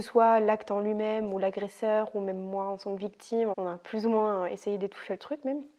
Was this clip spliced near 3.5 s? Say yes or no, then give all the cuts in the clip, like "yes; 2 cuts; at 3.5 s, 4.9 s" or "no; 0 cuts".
yes; 1 cut; at 3.5 s